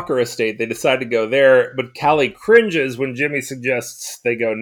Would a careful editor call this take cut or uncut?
uncut